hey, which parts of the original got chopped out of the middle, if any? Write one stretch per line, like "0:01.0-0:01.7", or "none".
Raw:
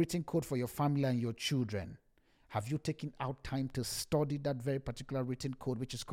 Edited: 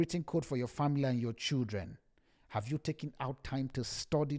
none